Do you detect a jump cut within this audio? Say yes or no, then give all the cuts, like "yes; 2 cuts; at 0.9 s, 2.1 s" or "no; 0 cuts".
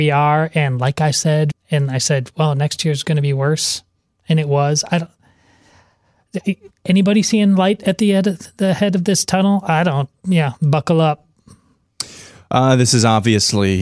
yes; 2 cuts; at 1.5 s, 10.2 s